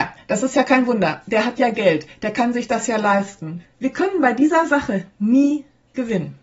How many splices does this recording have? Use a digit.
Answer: 1